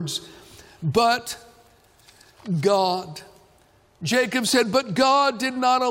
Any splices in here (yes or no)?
no